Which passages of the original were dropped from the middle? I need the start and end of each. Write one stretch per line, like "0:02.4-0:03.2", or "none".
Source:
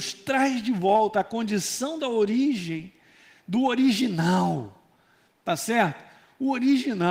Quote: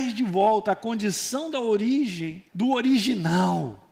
0:03.0-0:03.4

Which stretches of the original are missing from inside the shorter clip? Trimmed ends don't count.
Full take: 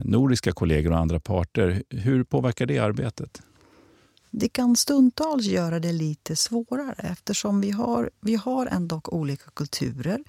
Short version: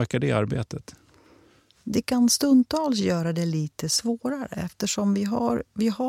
none

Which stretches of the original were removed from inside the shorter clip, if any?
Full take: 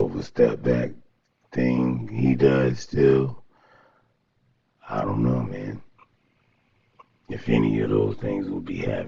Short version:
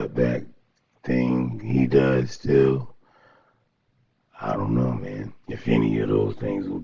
0:05.9-0:07.2

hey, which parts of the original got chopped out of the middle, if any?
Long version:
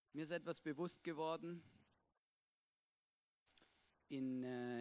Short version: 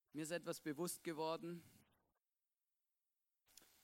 none

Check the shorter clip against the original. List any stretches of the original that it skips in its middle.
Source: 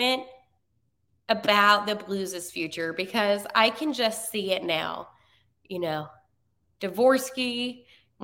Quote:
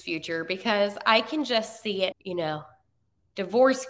0:04.6-0:05.6

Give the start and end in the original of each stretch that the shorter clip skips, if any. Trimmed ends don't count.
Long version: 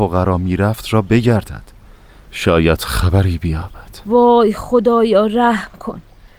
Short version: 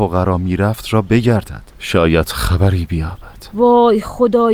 0:01.7-0:02.2

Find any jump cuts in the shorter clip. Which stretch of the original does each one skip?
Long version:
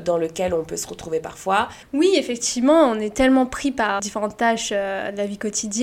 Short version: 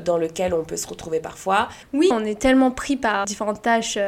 0:02.1-0:02.9

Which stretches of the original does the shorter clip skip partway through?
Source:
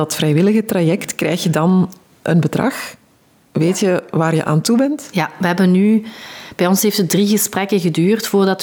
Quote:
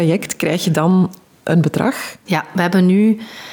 0:03.0-0:05.1

